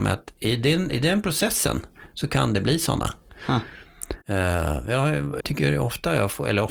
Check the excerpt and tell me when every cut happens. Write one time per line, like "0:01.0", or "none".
0:04.2
0:05.4